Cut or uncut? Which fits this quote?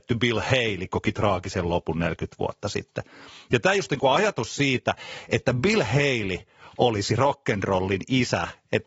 uncut